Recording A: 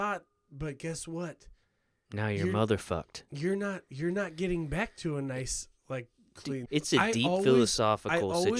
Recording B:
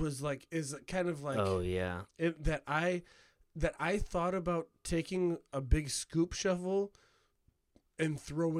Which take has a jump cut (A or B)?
A